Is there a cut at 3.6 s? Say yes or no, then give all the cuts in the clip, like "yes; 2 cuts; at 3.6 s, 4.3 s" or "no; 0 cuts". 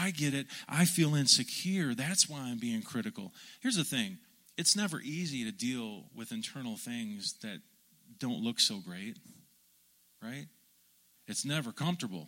yes; 2 cuts; at 3.6 s, 11.2 s